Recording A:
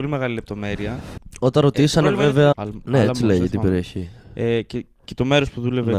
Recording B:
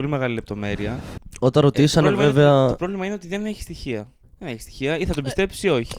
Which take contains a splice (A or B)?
A